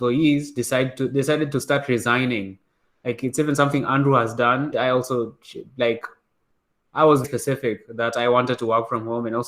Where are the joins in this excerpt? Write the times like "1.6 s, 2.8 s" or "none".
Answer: 4.7 s, 7.2 s